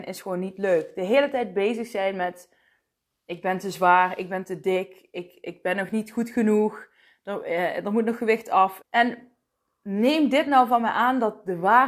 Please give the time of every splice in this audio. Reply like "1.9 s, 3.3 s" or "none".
8.8 s